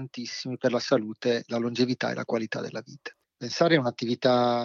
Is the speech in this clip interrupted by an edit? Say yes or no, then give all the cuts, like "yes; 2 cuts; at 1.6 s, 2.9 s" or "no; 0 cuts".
yes; 1 cut; at 3.2 s